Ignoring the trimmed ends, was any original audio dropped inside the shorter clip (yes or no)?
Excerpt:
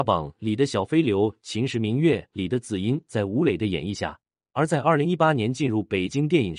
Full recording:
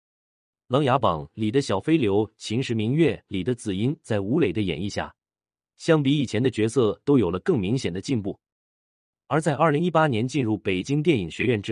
yes